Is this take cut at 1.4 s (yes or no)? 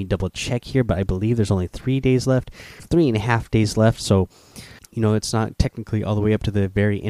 no